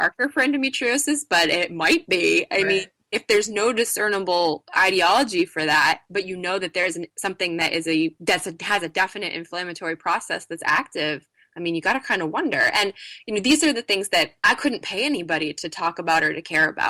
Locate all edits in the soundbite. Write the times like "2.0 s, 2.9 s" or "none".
none